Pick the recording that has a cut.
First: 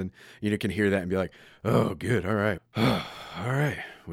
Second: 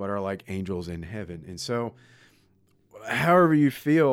first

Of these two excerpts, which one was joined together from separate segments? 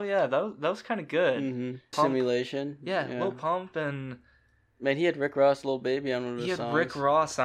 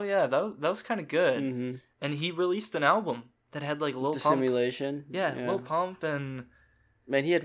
first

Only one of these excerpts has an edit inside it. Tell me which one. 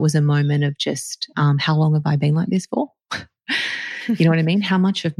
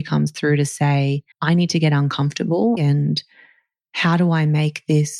second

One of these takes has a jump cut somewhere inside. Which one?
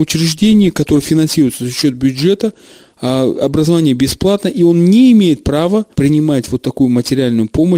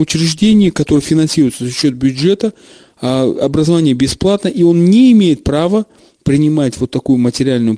first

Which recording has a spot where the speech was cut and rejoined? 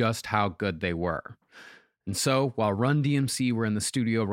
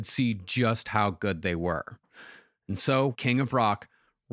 second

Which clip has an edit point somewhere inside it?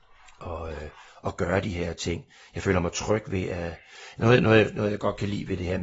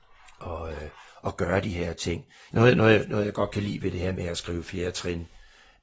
second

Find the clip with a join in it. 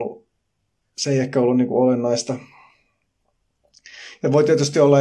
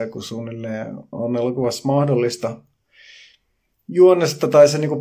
second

